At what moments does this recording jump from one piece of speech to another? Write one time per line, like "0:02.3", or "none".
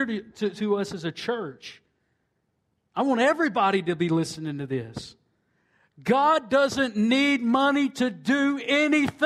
none

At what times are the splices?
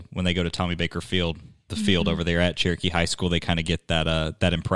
0:01.7

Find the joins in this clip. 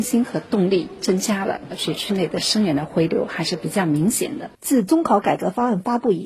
0:04.5

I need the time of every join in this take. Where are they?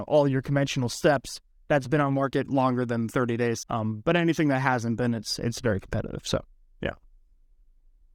0:03.6

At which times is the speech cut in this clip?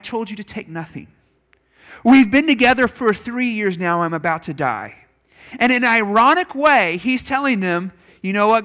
none

